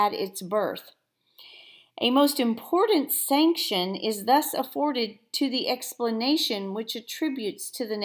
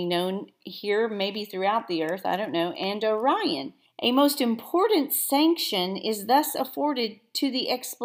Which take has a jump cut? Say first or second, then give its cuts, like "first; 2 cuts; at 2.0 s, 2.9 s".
second; 1 cut; at 3.9 s